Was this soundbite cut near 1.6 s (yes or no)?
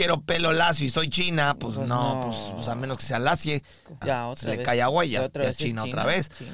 no